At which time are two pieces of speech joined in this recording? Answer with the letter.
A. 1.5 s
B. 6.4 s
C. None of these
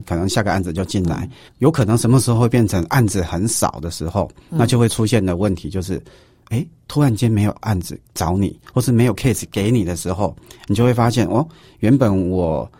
A